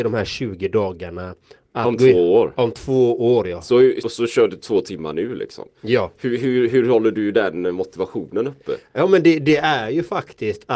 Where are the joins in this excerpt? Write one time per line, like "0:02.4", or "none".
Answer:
0:04.0